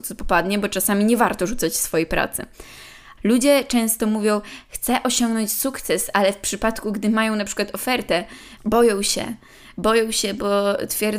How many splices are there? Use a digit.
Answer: 2